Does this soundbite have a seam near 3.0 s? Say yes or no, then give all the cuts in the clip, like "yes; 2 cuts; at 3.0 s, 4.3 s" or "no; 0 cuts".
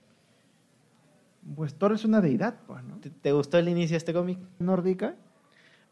yes; 2 cuts; at 3.0 s, 4.6 s